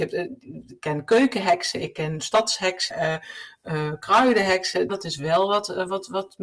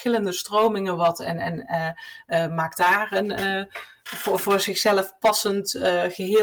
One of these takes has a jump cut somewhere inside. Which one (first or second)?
first